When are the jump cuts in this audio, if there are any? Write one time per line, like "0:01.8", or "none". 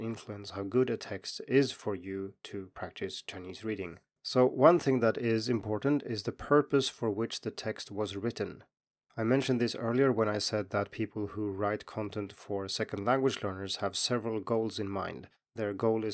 none